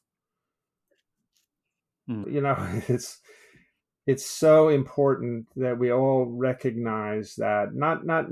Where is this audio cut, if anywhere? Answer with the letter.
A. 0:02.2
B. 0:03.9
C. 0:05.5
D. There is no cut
A